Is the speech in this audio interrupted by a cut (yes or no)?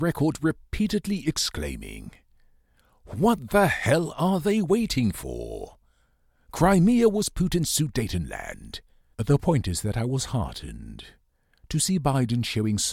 yes